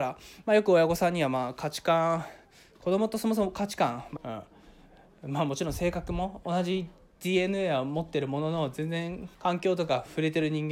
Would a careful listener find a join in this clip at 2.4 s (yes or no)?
no